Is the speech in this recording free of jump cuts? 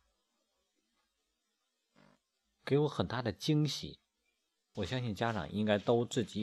no; 1 cut; at 4.7 s

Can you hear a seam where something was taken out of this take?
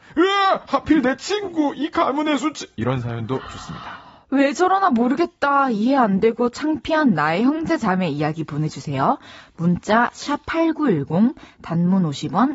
no; 0 cuts

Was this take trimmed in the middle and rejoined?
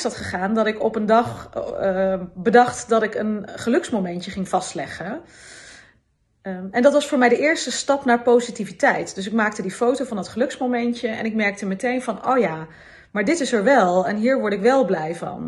no; 0 cuts

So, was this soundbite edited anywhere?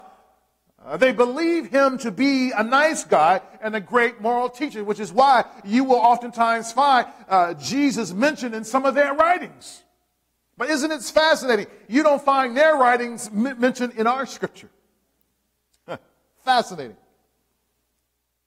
no; 0 cuts

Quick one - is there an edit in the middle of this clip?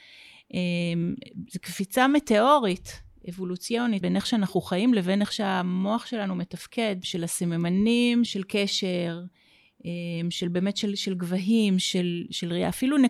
yes; 3 cuts; at 4.0 s, 7.0 s, 8.3 s

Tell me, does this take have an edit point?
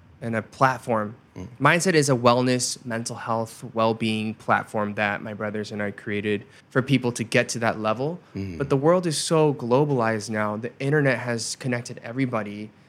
yes; 1 cut; at 6.6 s

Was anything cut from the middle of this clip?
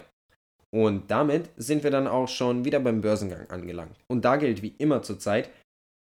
yes; 1 cut; at 4.0 s

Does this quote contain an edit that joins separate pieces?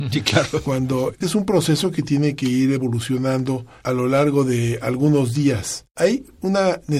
yes; 1 cut; at 1.2 s

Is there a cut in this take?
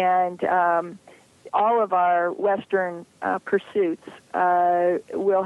yes; 1 cut; at 1.5 s

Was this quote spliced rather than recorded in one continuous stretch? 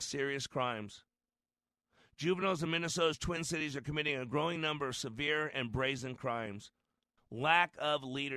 yes; 1 cut; at 7.2 s

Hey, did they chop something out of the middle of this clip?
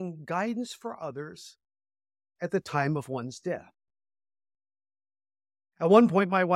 no; 0 cuts

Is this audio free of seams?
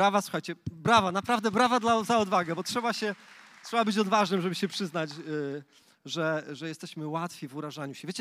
yes; 0 cuts

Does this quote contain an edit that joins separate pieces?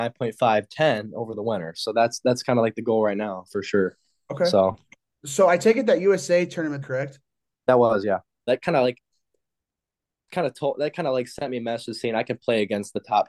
yes; 2 cuts; at 6.8 s, 8.5 s

